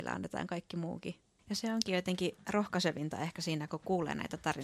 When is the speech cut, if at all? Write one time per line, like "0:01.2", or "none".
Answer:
0:01.4